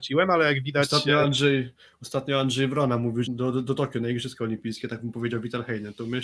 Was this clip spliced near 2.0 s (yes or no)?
no